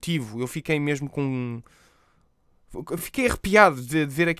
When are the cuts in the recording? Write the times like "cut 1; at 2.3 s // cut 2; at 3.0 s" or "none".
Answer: none

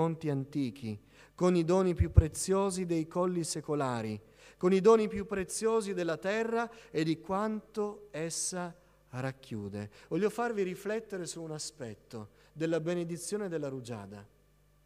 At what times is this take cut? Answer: none

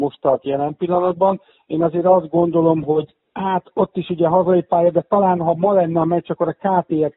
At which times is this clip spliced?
cut 1; at 2.8 s

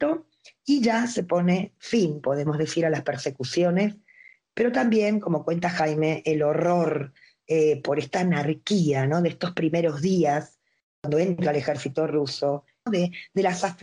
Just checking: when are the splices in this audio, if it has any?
cut 1; at 12.9 s

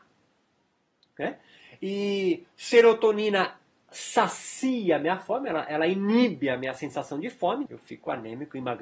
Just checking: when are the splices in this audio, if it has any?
cut 1; at 7.7 s

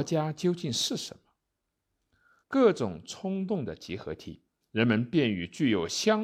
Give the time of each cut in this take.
cut 1; at 2.4 s // cut 2; at 4.6 s

